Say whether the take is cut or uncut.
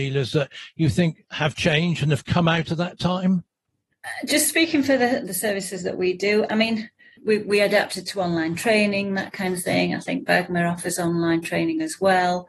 cut